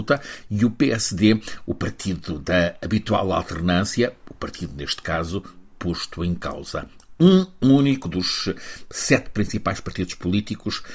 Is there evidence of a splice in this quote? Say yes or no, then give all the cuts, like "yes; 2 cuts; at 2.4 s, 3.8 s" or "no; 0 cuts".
no; 0 cuts